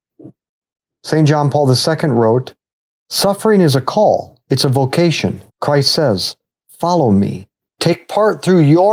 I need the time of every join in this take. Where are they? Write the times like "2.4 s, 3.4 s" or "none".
5.5 s, 7.7 s